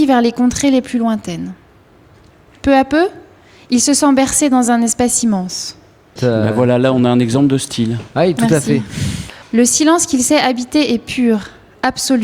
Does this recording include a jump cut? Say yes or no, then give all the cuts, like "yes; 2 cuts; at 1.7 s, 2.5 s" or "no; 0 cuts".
yes; 2 cuts; at 6.2 s, 9.4 s